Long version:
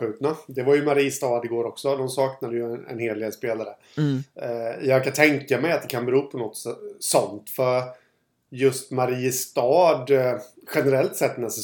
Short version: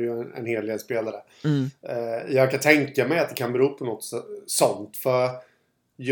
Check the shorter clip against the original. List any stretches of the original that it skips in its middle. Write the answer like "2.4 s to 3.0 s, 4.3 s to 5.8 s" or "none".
none